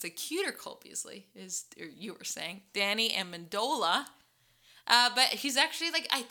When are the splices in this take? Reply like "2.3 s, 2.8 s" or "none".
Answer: none